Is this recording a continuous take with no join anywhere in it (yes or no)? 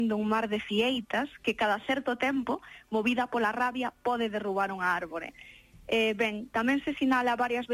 yes